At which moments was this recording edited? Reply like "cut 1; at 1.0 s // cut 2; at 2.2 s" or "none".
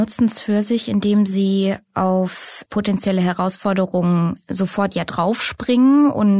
cut 1; at 2.7 s